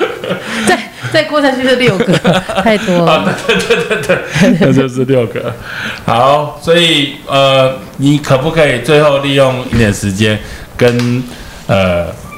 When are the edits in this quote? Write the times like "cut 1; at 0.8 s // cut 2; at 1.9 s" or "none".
cut 1; at 9.7 s